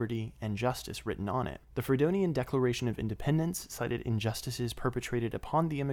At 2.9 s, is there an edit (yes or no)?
no